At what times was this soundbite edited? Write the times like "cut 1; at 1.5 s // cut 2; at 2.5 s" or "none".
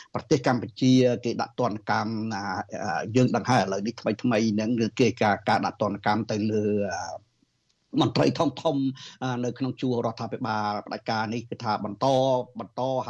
none